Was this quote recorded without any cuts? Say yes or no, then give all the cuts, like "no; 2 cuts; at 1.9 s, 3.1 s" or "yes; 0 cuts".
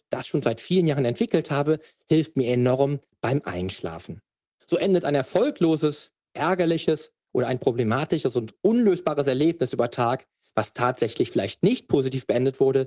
no; 1 cut; at 4.5 s